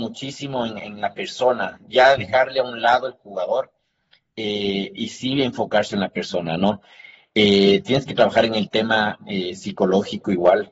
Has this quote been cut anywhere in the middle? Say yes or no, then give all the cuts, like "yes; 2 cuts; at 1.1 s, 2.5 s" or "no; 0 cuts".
yes; 1 cut; at 7.2 s